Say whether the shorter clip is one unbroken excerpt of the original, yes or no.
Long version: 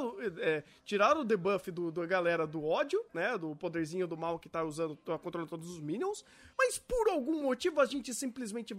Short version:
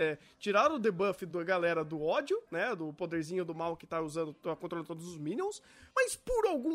no